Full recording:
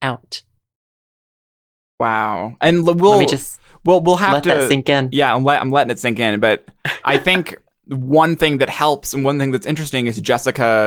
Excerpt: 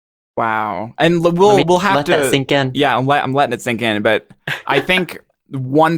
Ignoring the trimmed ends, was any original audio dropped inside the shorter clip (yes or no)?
yes